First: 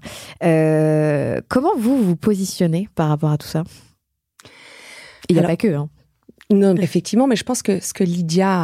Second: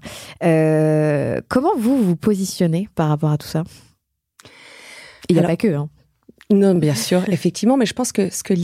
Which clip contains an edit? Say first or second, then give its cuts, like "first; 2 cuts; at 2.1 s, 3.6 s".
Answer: first; 1 cut; at 6.8 s